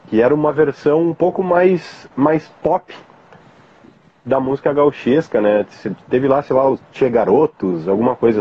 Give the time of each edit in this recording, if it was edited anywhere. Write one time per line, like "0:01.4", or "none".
none